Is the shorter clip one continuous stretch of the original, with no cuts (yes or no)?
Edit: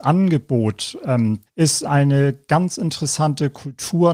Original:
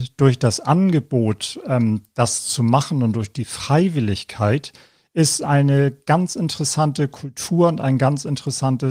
no